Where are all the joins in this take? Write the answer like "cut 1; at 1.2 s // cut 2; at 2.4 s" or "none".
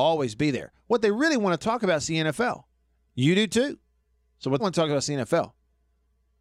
cut 1; at 3.1 s // cut 2; at 4.6 s